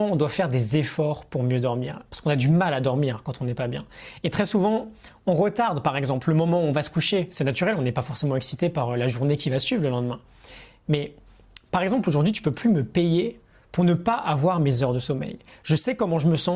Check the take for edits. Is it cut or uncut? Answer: uncut